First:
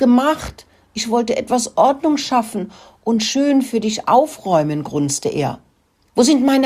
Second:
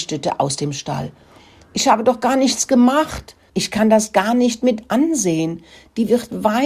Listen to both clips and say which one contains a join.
second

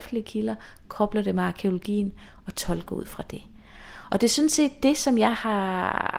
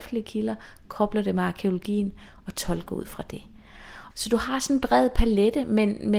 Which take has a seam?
second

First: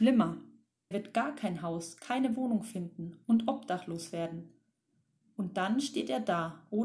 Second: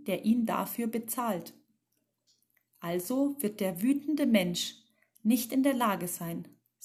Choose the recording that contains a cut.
first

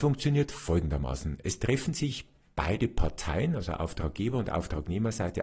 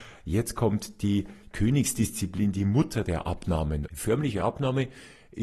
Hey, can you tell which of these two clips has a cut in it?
second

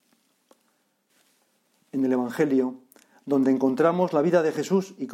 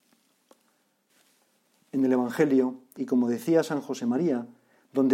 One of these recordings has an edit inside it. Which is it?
second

